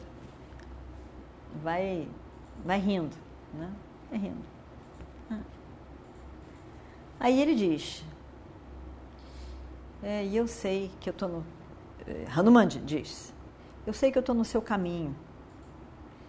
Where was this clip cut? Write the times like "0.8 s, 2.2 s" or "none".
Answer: none